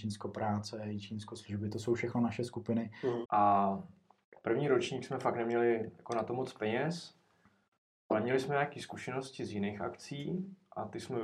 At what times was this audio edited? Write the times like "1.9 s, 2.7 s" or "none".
3.2 s